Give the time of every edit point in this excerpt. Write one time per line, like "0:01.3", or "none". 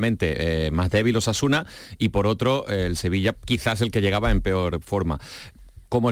none